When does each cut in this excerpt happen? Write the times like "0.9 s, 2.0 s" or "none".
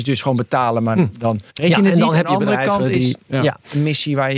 1.5 s